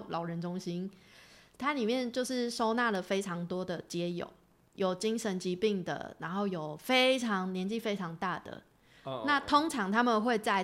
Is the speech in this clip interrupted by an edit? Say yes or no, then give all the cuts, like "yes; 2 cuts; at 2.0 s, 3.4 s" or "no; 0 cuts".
no; 0 cuts